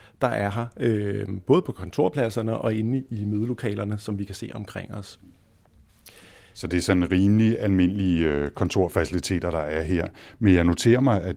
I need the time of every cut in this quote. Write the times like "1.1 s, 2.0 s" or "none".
none